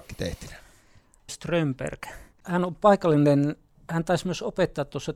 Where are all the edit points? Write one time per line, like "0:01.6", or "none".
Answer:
0:01.3

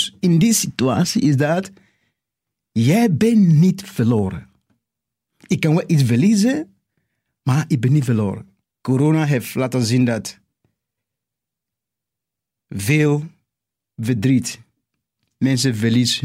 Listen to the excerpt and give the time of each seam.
0:08.6

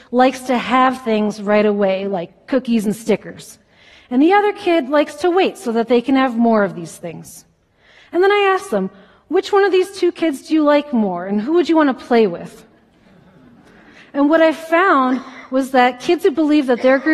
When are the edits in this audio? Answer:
none

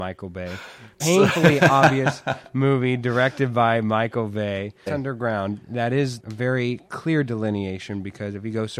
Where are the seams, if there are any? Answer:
0:01.0
0:04.9
0:06.2

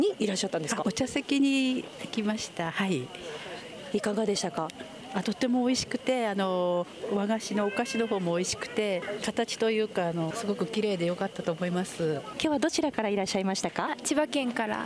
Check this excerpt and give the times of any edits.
none

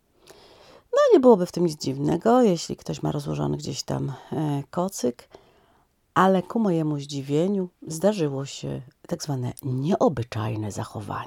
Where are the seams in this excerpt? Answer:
0:07.8

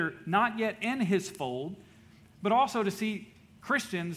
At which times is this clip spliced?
none

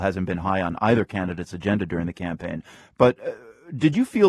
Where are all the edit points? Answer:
none

